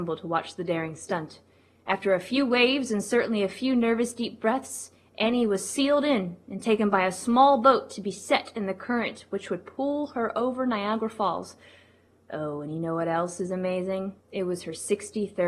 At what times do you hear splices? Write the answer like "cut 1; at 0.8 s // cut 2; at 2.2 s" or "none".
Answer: cut 1; at 14.2 s